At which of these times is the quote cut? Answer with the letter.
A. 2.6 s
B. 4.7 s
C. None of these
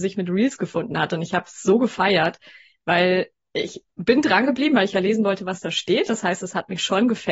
C